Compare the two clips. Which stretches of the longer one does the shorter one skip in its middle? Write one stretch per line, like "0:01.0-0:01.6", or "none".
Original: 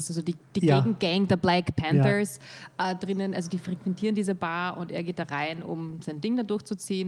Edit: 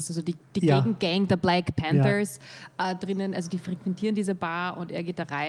none